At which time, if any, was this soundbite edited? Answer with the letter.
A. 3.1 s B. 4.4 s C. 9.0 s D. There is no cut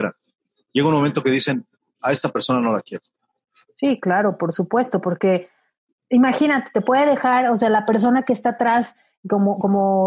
D